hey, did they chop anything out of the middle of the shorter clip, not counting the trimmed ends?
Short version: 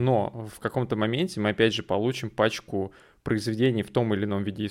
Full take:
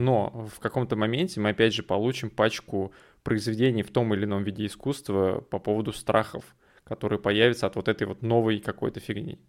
no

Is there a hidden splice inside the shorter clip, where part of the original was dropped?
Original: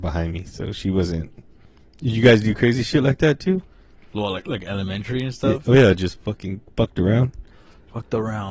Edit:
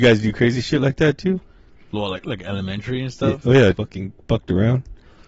yes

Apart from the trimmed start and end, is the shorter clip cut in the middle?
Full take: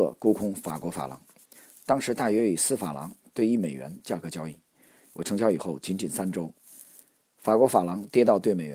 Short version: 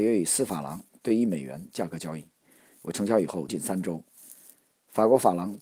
yes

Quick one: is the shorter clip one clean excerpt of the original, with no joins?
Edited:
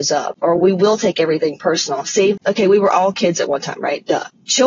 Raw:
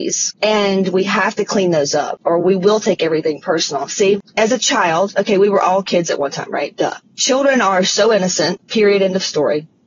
no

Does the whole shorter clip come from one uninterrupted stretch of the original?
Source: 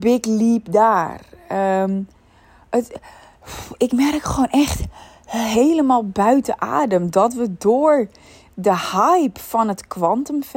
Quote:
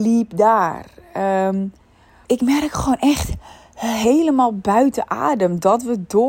no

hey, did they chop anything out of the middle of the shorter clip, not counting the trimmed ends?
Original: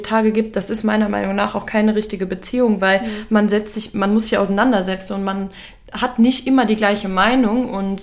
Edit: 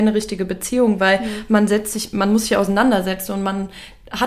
no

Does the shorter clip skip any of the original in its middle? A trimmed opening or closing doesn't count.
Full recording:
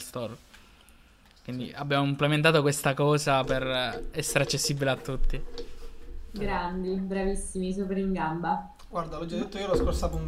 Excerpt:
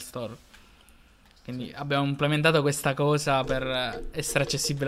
no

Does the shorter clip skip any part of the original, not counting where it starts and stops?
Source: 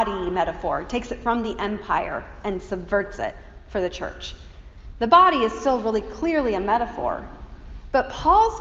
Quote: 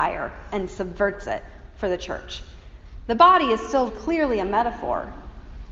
yes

